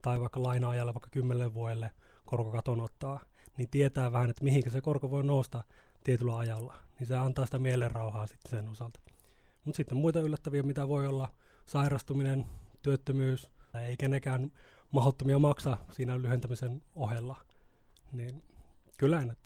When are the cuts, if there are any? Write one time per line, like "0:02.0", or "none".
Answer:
0:13.7